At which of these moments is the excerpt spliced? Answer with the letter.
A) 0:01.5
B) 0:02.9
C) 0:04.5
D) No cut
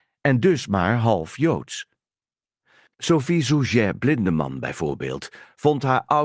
B